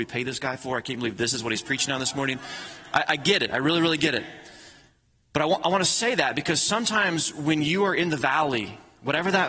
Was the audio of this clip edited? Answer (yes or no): no